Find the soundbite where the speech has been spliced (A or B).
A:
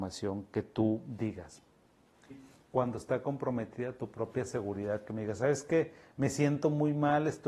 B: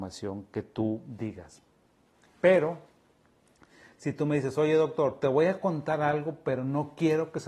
A